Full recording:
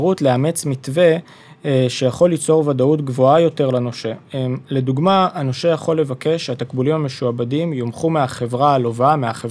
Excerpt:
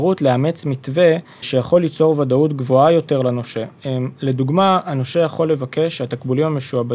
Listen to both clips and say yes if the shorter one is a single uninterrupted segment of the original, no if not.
no